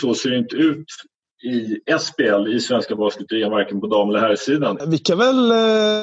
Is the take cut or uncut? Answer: cut